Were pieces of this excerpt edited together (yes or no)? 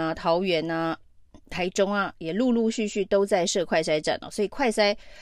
no